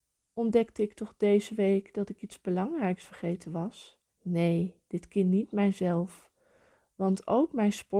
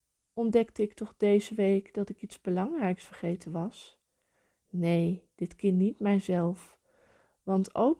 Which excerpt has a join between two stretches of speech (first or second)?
first